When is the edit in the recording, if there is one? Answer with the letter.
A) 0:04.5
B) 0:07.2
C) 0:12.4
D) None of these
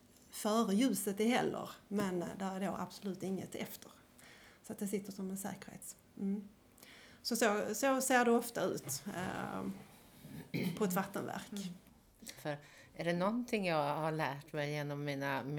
C